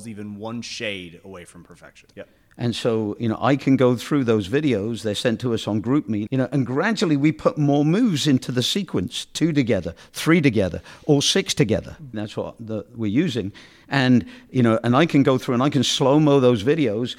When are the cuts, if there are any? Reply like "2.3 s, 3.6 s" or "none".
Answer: 2.1 s, 6.3 s, 12.1 s